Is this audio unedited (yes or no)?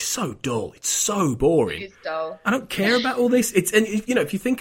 no